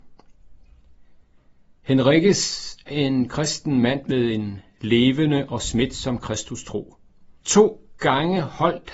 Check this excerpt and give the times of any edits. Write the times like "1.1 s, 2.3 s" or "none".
2.9 s, 7.4 s